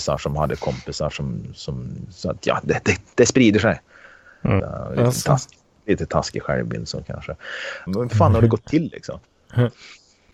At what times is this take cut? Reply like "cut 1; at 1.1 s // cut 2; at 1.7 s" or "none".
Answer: cut 1; at 3.1 s // cut 2; at 4.6 s // cut 3; at 7.9 s